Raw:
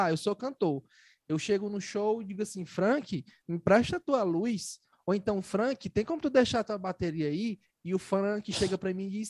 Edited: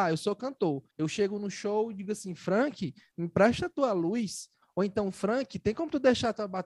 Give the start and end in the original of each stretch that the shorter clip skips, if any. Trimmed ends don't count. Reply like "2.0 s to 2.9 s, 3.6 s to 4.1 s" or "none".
0.9 s to 1.2 s